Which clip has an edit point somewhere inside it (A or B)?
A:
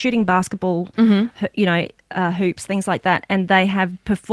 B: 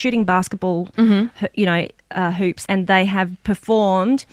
B